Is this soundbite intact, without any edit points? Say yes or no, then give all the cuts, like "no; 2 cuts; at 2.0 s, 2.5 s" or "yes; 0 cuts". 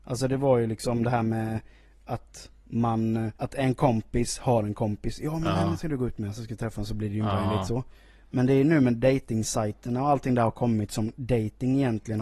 no; 1 cut; at 3.4 s